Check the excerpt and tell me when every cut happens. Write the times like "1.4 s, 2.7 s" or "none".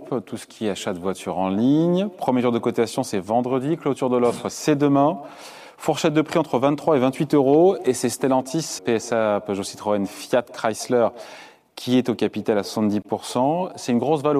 8.8 s